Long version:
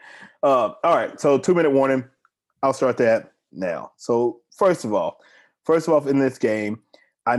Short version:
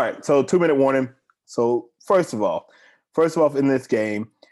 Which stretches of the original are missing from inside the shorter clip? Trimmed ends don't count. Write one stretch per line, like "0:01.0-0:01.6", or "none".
0:02.4-0:04.0